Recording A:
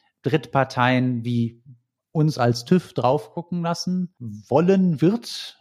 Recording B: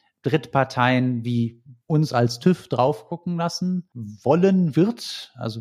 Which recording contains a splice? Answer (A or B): B